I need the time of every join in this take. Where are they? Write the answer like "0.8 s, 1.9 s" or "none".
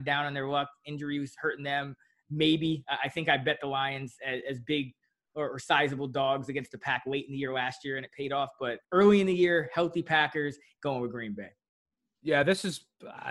8.8 s, 10.8 s